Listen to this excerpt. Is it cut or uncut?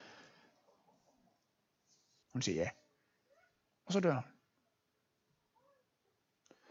cut